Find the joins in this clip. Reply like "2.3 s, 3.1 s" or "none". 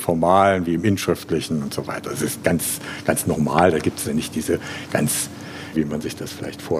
4.0 s, 5.7 s